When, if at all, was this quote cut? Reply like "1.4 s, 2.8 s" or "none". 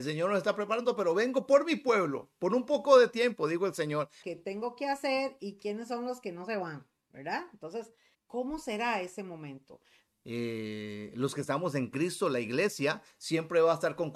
4.2 s, 8.1 s, 10.1 s